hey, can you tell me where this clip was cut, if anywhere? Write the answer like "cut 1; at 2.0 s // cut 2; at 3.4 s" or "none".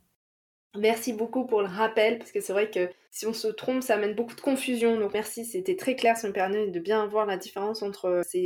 none